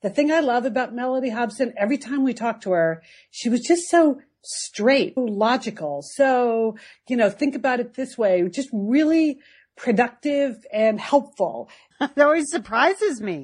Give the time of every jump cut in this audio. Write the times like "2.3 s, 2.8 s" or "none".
5.2 s, 11.9 s